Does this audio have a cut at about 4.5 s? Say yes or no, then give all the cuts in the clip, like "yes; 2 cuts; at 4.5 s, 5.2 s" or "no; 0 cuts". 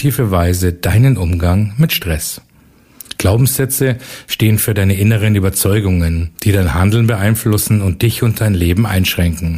no; 2 cuts; at 3.1 s, 6.4 s